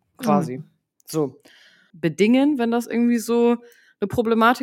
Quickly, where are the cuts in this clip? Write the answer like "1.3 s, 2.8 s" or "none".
1.9 s